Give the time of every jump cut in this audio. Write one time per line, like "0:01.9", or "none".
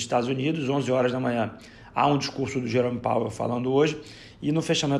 none

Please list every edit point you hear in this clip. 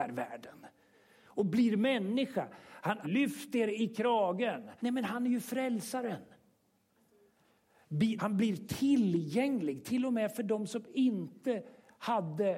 0:03.0
0:04.8
0:08.2

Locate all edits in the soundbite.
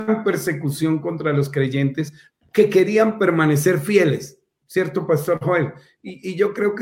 none

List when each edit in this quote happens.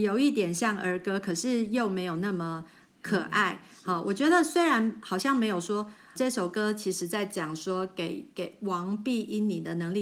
0:06.2

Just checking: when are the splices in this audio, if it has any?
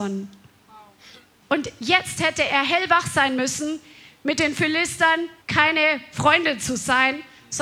0:01.4
0:05.4

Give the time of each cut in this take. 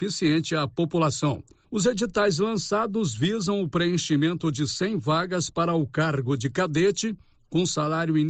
0:01.6

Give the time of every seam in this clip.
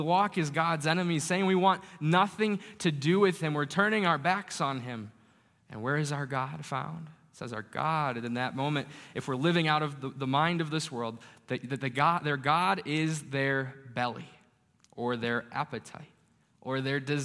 none

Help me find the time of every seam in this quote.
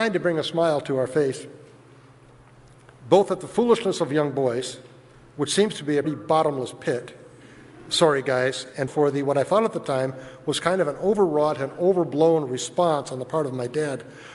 0:06.0
0:08.9

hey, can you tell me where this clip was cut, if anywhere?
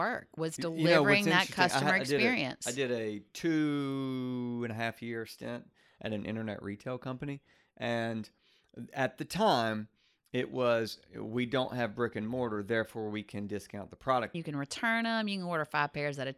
0:14.3

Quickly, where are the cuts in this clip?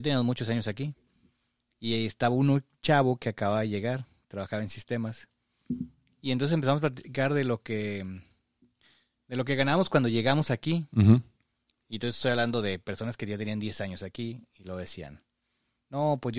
none

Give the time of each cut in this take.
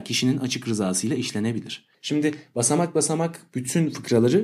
0:01.9

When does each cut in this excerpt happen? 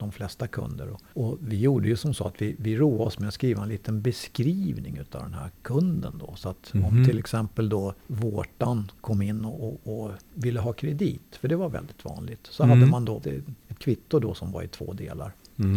0:13.2

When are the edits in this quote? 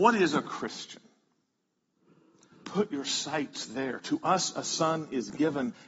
0:02.5

